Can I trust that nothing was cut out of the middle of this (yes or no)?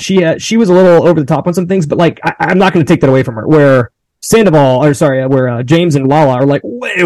yes